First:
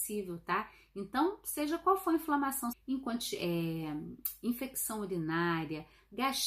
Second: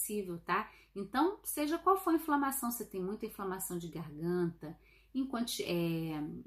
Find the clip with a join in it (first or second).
first